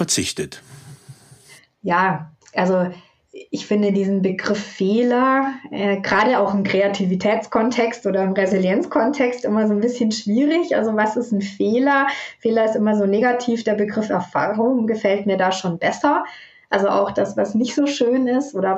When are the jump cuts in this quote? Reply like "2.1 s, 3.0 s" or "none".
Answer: none